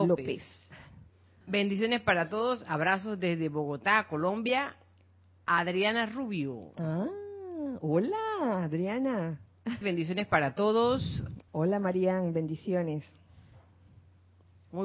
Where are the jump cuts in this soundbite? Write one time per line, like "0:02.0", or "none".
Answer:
0:01.4
0:09.8
0:11.5